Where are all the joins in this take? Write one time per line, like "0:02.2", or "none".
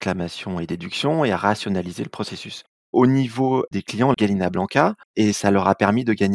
0:02.7
0:04.1